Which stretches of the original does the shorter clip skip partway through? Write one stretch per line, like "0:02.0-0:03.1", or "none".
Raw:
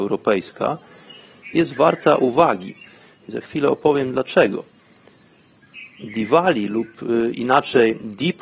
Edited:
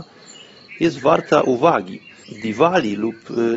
0:03.0-0:06.0